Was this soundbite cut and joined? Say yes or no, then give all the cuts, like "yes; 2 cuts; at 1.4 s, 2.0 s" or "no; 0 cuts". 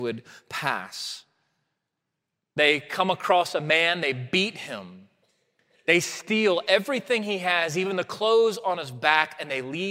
no; 0 cuts